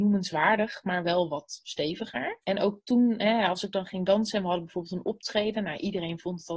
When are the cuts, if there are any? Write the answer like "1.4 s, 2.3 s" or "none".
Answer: none

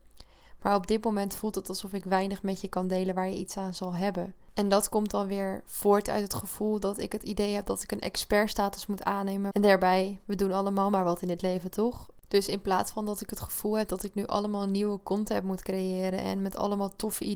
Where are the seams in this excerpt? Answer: 9.5 s, 12.2 s

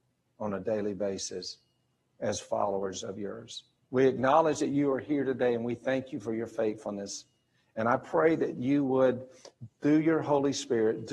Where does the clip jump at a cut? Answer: 3.8 s

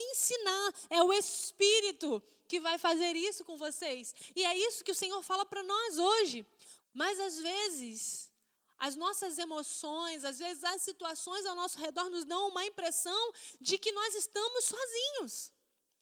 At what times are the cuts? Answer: 6.8 s

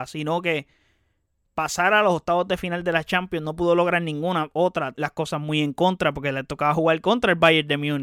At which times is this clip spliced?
4.9 s

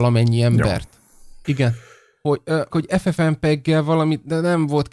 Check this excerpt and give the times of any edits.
1.4 s, 2.7 s

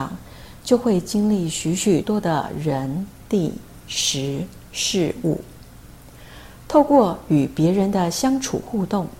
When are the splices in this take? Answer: 2.0 s

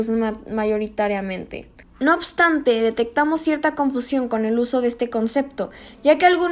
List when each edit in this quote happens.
1.8 s

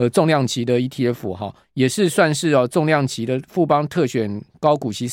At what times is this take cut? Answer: 1.6 s

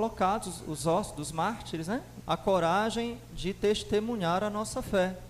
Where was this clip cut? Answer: 2.2 s

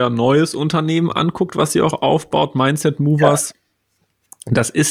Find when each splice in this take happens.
none

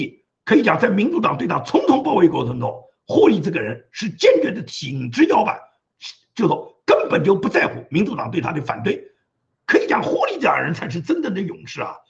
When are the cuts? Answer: none

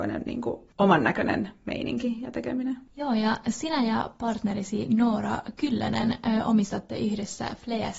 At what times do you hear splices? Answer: none

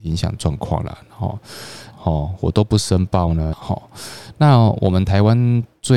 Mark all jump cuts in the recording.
1.9 s, 3.5 s

